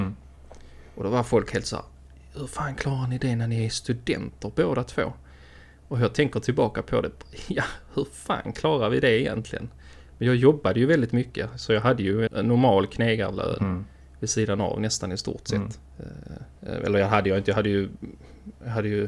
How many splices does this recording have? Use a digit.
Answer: 2